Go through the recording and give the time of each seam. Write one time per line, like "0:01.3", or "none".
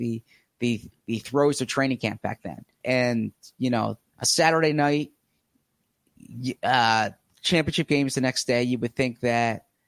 0:02.8
0:04.1

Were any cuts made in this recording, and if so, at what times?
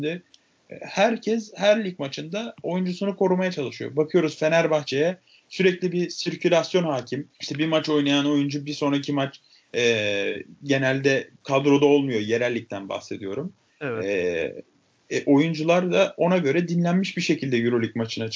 0:07.3

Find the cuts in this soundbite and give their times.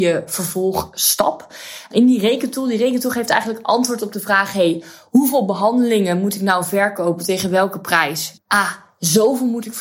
0:08.4

